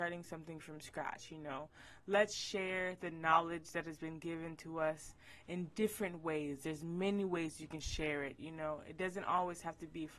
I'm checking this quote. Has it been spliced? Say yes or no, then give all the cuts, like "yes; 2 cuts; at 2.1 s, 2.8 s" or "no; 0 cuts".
no; 0 cuts